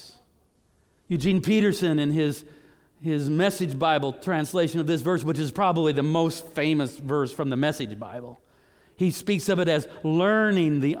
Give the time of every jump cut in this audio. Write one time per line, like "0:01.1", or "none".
0:01.0